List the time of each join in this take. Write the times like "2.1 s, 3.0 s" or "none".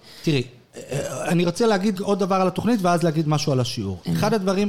1.9 s

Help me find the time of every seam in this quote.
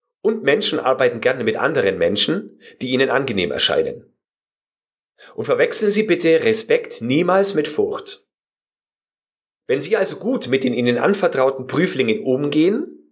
none

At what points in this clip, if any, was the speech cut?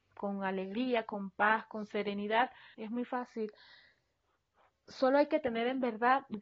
2.7 s

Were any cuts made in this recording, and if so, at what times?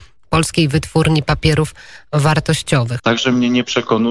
3.0 s

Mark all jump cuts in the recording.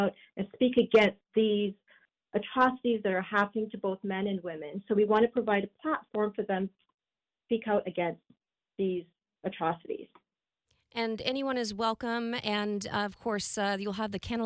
none

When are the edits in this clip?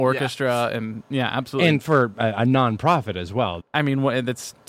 3.6 s

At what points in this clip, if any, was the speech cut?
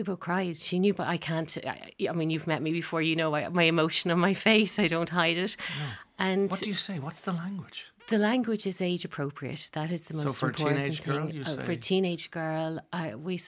none

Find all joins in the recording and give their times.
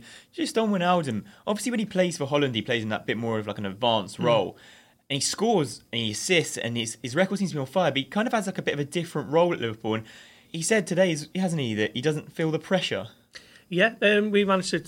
10.4 s

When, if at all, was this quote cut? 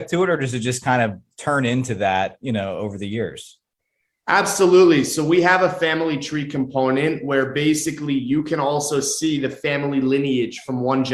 none

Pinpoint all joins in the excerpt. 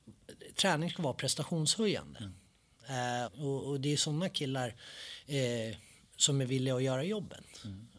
3.3 s

